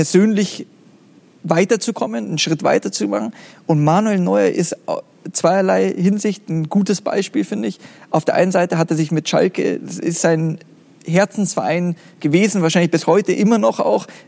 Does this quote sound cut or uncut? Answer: uncut